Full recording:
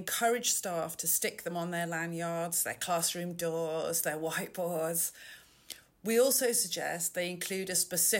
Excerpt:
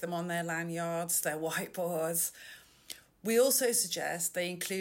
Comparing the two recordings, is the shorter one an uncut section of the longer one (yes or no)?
no